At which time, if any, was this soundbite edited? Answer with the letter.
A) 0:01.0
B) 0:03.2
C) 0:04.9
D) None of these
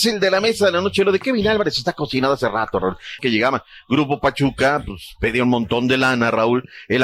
B